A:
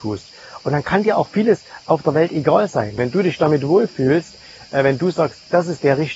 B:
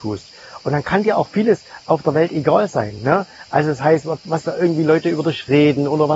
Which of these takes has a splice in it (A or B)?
A